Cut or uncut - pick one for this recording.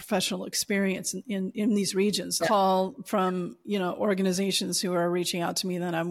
cut